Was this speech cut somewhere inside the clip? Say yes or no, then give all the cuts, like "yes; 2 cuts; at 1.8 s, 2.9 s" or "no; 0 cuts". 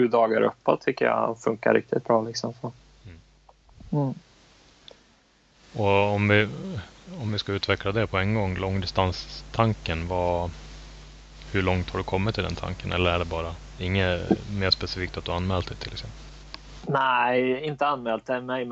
no; 0 cuts